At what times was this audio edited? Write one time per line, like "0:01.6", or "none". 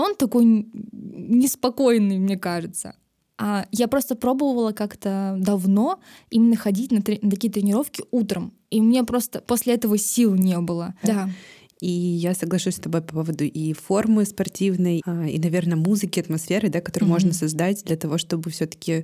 0:11.0
0:15.0